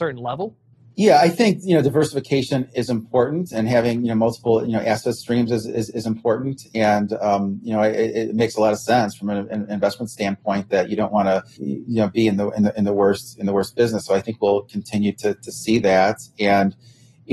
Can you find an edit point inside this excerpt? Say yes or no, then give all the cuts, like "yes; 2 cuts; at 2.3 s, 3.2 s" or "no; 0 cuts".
yes; 1 cut; at 11.6 s